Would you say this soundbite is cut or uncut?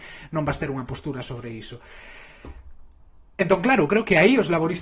uncut